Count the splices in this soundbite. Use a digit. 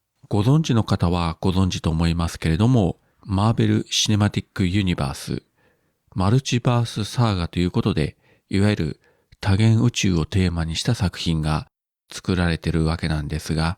2